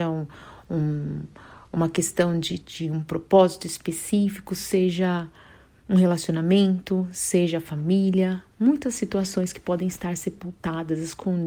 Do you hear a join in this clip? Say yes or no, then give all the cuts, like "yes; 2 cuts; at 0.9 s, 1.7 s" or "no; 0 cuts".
no; 0 cuts